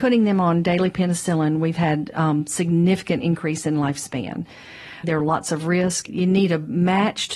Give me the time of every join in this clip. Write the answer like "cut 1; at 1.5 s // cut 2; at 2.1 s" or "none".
cut 1; at 5.0 s // cut 2; at 6.1 s